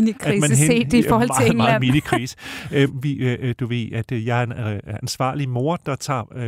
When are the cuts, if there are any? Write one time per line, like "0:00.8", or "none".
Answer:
0:02.9